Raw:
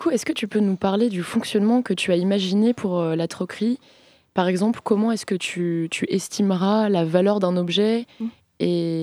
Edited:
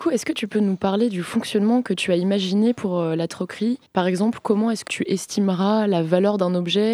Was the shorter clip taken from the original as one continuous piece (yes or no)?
no